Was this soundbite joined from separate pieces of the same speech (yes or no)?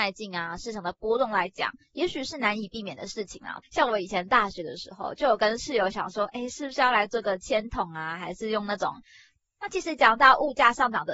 yes